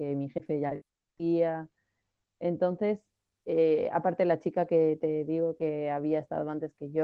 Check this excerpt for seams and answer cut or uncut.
uncut